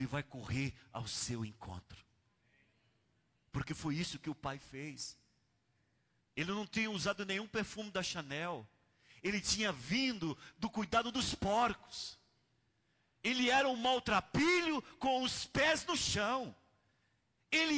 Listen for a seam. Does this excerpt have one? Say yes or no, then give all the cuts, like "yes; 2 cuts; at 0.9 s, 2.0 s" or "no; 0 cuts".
yes; 1 cut; at 6.3 s